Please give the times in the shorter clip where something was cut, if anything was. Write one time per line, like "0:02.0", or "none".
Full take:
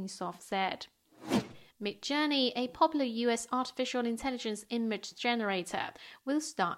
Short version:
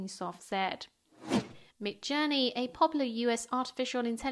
none